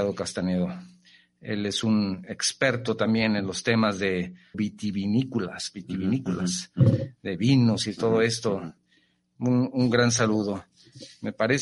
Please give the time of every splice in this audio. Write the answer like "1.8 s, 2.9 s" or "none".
4.5 s